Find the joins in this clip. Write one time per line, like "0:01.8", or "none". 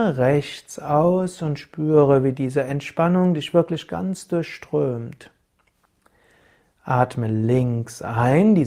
none